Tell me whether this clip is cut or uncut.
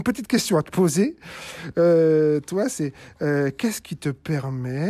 uncut